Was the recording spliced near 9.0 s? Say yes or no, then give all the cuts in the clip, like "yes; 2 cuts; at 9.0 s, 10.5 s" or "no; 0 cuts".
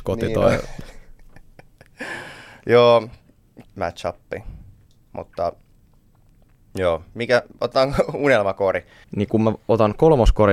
yes; 2 cuts; at 3.6 s, 9.0 s